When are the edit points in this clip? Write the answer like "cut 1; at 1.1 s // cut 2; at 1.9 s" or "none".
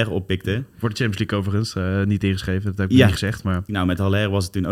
cut 1; at 3.7 s